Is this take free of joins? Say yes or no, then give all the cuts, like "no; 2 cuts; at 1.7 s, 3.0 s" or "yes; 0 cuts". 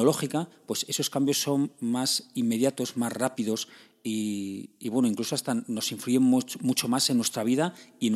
yes; 0 cuts